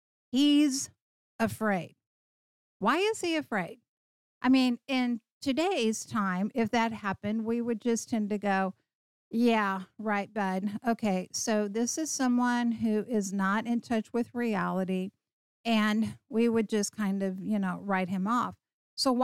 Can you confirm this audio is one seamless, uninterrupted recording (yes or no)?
yes